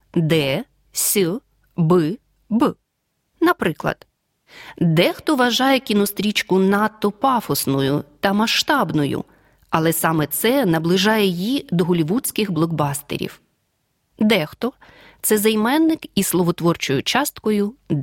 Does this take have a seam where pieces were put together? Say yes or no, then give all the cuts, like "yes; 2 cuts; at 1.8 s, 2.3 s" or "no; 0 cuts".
no; 0 cuts